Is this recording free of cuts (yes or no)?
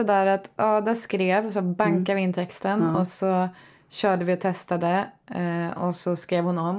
yes